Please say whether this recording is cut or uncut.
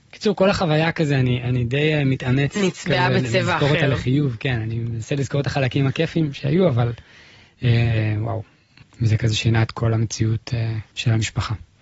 uncut